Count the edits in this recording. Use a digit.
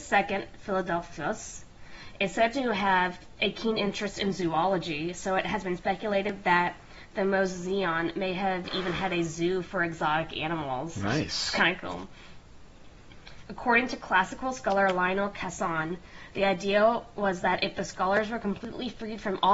0